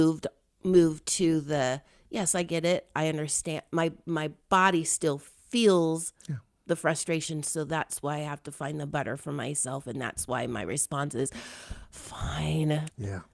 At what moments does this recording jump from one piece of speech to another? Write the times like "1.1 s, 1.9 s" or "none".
none